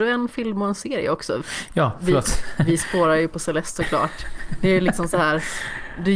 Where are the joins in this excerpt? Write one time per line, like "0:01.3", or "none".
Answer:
none